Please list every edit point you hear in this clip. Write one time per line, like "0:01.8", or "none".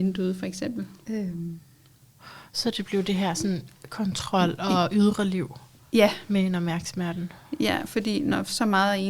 0:01.0